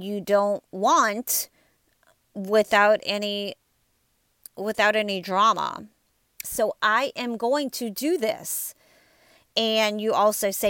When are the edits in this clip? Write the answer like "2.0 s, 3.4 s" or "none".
6.4 s